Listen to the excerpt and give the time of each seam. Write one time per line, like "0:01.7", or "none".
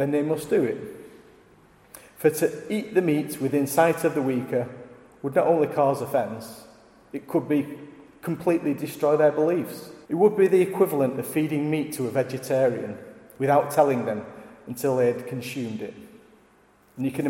0:10.0